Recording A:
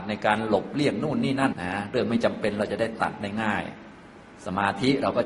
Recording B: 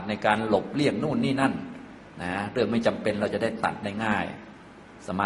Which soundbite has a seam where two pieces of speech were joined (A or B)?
A